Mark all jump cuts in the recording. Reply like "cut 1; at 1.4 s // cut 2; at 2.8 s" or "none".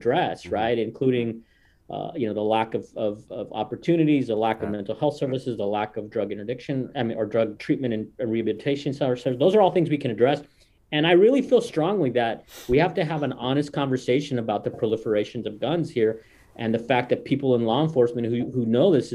cut 1; at 7.6 s